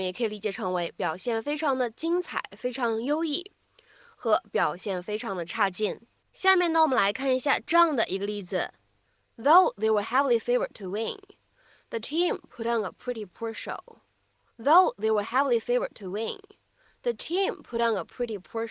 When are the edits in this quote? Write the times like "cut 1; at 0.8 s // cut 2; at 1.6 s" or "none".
cut 1; at 14.5 s